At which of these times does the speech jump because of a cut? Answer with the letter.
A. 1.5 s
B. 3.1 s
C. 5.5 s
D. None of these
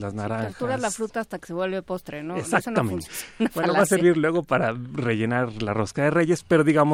B